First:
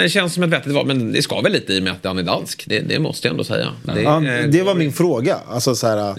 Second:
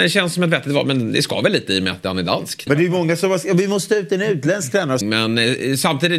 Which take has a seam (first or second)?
second